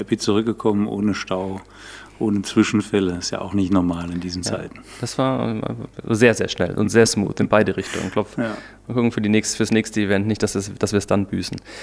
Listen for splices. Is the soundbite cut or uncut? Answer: uncut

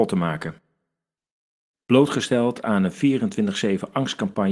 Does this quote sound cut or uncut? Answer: cut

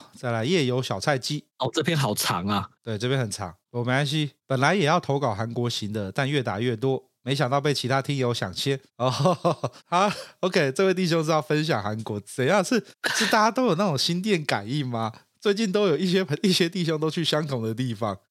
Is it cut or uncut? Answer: uncut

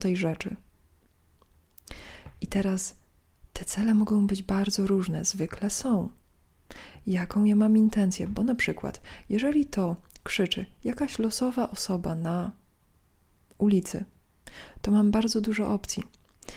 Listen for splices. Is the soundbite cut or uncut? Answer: uncut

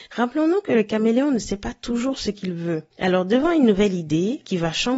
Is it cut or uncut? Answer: cut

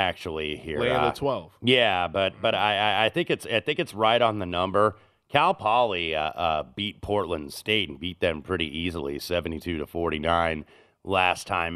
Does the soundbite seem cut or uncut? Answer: uncut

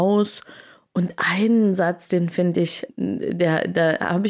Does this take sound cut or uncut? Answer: cut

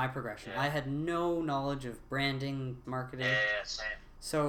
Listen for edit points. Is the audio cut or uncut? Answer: cut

